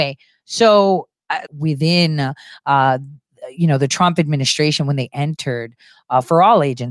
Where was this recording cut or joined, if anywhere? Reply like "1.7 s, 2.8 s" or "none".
1.5 s